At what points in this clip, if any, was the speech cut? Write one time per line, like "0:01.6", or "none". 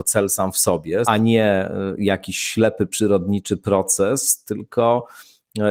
0:01.0